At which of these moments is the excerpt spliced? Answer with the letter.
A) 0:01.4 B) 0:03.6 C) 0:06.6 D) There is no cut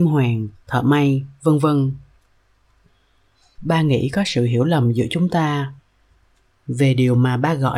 B